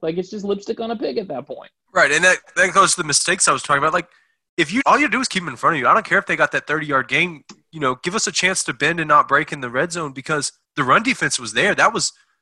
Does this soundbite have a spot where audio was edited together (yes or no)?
yes